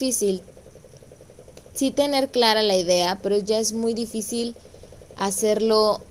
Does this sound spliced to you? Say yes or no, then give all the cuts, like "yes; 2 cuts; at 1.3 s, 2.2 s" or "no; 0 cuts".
no; 0 cuts